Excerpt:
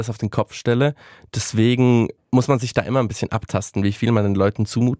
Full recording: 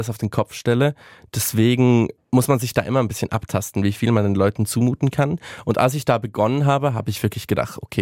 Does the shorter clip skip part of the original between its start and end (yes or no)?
no